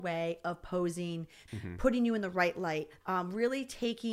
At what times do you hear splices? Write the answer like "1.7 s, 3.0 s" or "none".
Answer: 1.5 s, 3.0 s